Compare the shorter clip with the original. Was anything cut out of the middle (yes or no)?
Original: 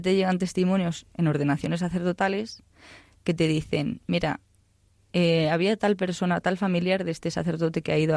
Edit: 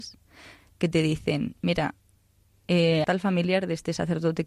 yes